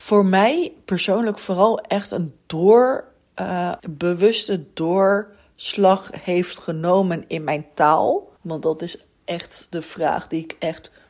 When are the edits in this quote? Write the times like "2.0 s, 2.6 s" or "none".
3.8 s, 8.4 s